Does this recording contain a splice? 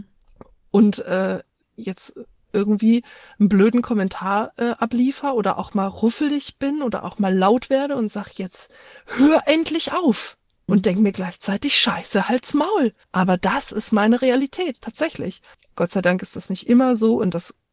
yes; 2 cuts; at 10.7 s, 13.0 s

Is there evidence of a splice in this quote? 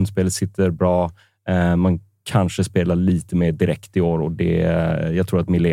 no; 0 cuts

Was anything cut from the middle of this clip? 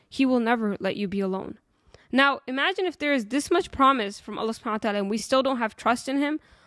no; 0 cuts

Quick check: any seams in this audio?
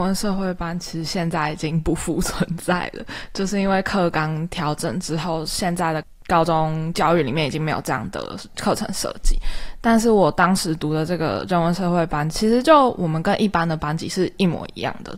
no; 0 cuts

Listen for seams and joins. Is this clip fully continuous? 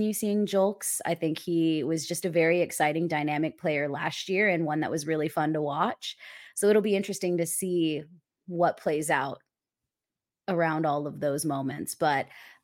no; 1 cut; at 6.5 s

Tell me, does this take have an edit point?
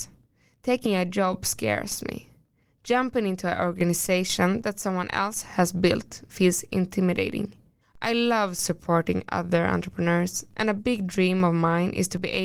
yes; 1 cut; at 7.8 s

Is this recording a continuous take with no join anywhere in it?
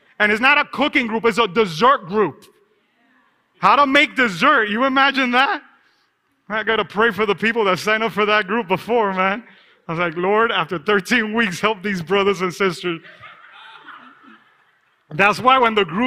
yes; 0 cuts

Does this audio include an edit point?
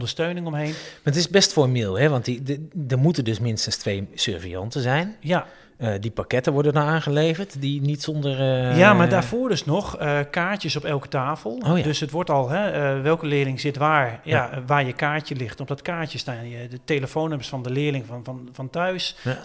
no; 0 cuts

